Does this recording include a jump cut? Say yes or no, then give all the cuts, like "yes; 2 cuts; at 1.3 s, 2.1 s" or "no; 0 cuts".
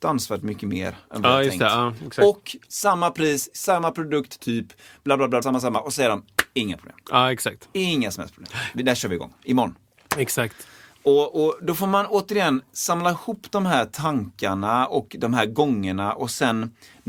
yes; 1 cut; at 5.4 s